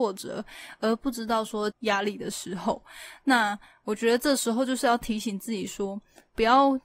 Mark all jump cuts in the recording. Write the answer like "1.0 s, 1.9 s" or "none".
1.7 s

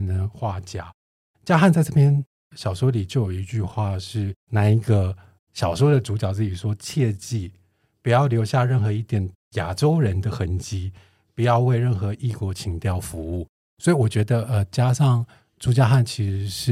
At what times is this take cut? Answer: none

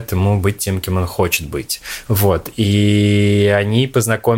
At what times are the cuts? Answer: 2.0 s

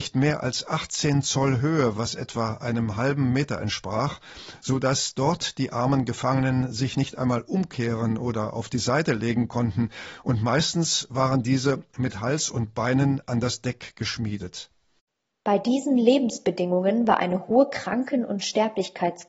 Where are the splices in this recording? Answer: none

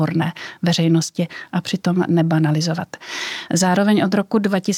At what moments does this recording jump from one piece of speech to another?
none

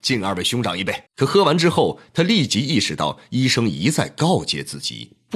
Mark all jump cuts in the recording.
1.1 s

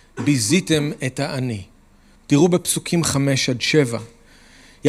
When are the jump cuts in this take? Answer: 2.2 s

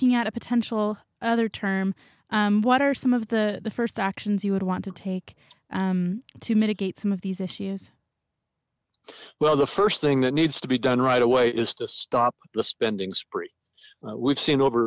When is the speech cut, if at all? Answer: none

